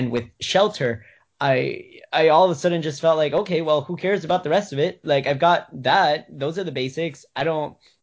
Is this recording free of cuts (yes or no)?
yes